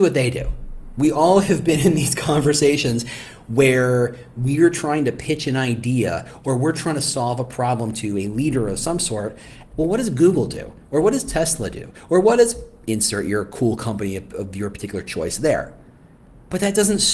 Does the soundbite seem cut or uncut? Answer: cut